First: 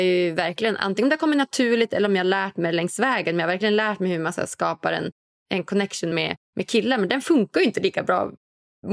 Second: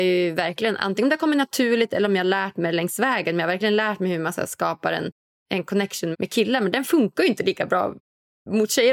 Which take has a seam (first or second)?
second